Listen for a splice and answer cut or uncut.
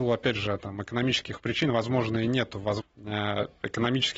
cut